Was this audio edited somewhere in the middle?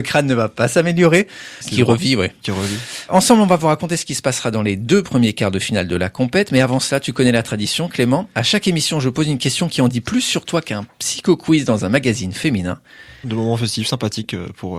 yes; 2 cuts; at 1.6 s, 13.2 s

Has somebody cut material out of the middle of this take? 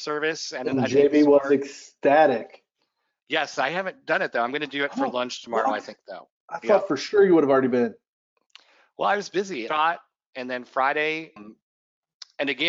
yes; 2 cuts; at 9.7 s, 11.4 s

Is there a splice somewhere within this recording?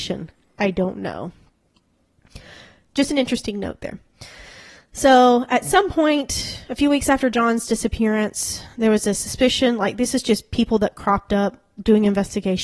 no; 0 cuts

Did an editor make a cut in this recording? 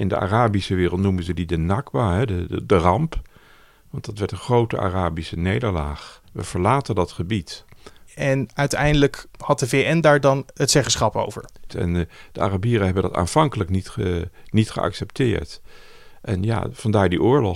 yes; 3 cuts; at 6.2 s, 8.1 s, 11.7 s

